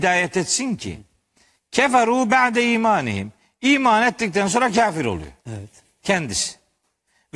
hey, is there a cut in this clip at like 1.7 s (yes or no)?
no